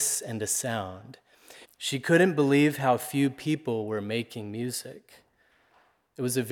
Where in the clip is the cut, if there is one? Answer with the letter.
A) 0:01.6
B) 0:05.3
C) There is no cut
A